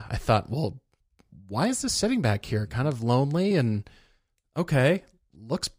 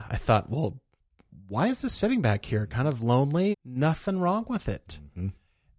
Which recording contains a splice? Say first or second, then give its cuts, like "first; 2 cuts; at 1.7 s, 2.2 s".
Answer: second; 1 cut; at 3.5 s